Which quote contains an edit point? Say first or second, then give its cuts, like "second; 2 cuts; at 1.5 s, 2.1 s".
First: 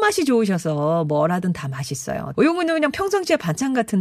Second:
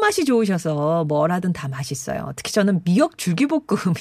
first; 1 cut; at 2.3 s